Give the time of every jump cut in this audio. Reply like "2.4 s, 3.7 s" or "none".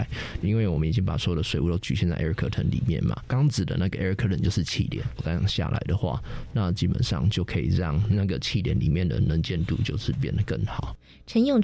5.2 s

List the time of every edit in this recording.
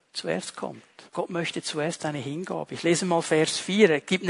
1.1 s

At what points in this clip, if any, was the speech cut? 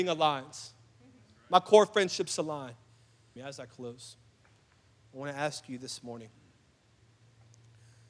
3.4 s

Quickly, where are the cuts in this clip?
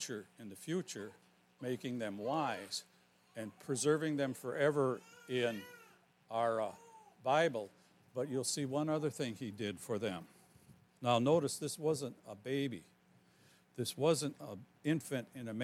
11.0 s

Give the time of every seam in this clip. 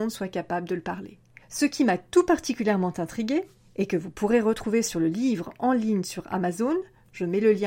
1.4 s

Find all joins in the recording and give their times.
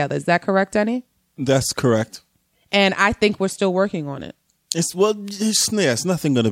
none

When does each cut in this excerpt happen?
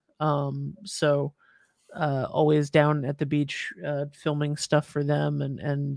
none

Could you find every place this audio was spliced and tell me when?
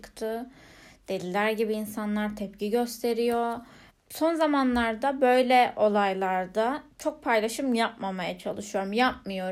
3.9 s, 6.9 s

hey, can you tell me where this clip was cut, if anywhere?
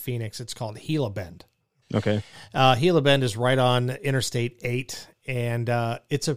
1.8 s

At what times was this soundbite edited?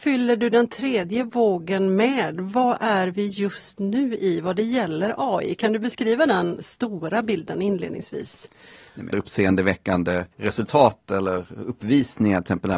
9.1 s, 10.3 s

